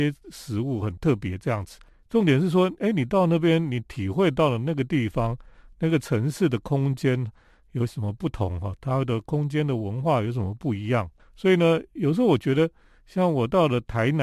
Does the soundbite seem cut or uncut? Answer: uncut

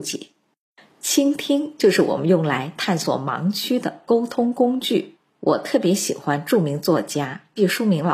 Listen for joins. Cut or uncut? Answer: uncut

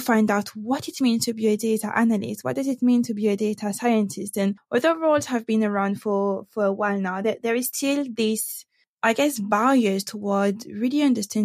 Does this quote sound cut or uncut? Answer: uncut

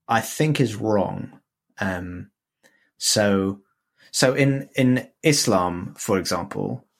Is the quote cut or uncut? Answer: uncut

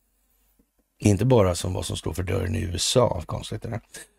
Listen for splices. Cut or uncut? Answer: cut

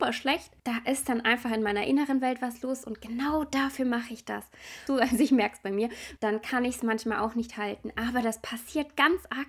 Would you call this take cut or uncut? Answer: cut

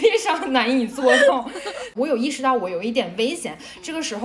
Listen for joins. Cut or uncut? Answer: cut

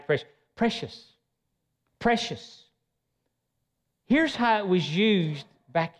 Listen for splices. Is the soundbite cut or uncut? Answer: cut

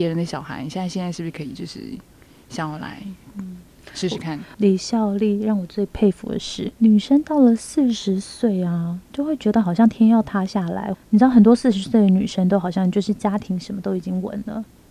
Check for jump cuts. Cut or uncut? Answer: cut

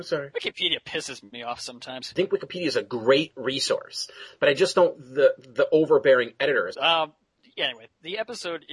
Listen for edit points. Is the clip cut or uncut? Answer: cut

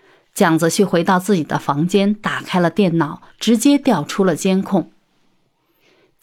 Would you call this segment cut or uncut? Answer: uncut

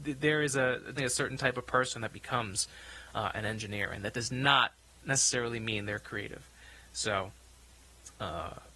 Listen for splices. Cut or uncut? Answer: cut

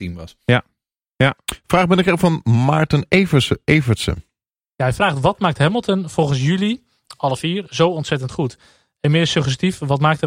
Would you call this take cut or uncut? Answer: uncut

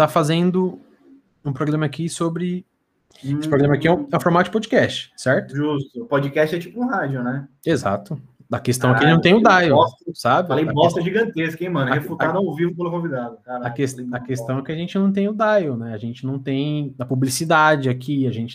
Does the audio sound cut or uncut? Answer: uncut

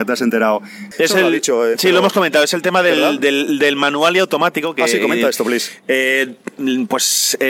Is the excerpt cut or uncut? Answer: cut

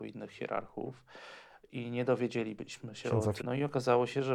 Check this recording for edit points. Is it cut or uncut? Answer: cut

